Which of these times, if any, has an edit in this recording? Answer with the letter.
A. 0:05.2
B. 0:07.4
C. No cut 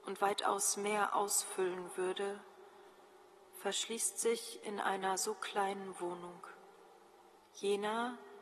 B